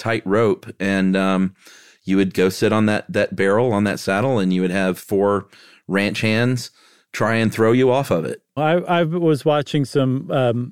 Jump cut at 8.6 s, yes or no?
yes